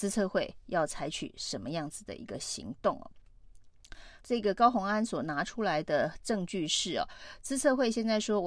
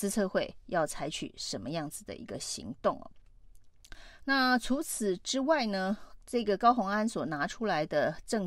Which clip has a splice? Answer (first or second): first